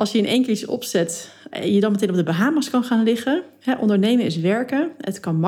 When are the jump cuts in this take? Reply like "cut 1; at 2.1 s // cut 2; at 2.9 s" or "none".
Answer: none